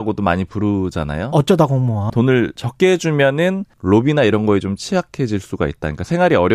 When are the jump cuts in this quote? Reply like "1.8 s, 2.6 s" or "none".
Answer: 2.1 s, 3.7 s